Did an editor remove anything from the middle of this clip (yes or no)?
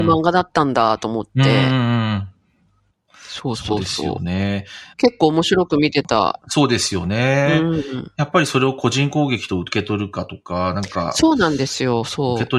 no